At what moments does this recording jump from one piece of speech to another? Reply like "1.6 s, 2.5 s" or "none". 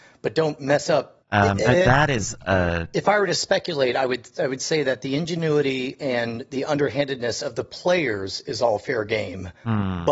1.2 s